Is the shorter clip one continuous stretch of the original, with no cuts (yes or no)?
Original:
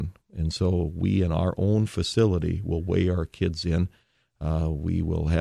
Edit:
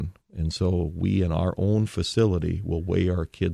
yes